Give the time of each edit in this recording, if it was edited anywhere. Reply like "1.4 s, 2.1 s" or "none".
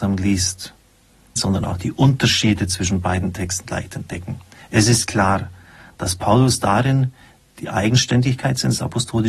1.4 s

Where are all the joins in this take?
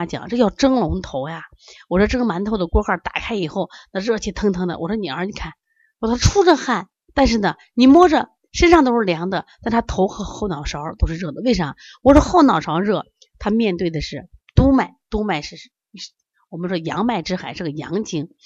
none

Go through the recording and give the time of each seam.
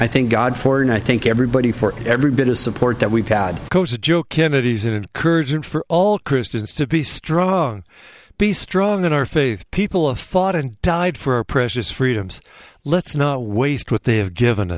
none

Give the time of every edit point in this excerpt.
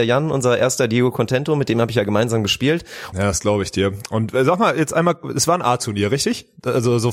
3.1 s

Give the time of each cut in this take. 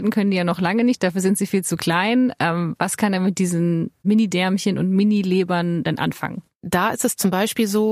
none

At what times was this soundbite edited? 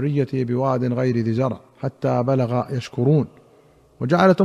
1.7 s

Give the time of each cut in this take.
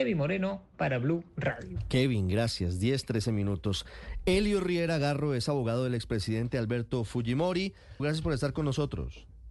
8.0 s

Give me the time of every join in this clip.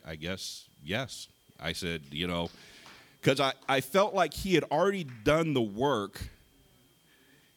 none

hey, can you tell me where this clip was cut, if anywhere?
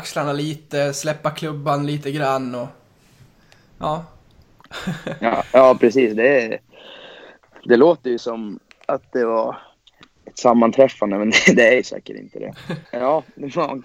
10.2 s, 12.8 s

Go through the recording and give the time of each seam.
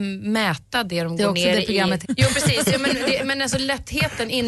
2.0 s

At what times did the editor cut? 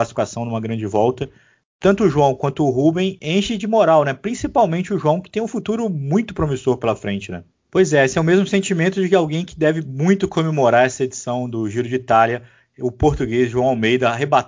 7.5 s

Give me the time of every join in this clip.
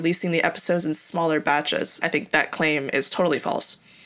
2.0 s

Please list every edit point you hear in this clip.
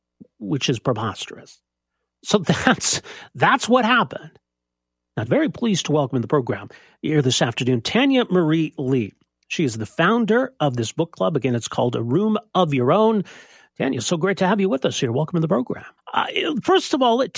5.3 s, 16.0 s

